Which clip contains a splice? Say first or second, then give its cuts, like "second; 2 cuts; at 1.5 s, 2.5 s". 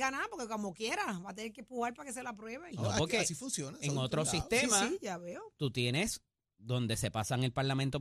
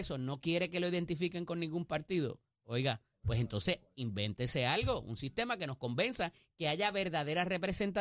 first; 1 cut; at 2.7 s